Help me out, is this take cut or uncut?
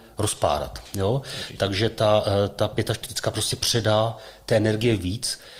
uncut